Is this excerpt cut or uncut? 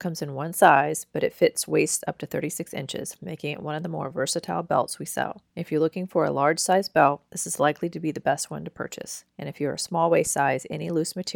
uncut